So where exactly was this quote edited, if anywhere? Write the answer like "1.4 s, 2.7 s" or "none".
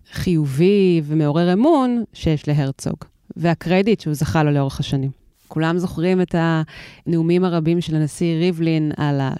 5.5 s